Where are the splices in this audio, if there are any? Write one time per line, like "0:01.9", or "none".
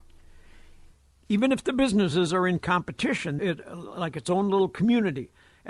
0:01.2
0:03.4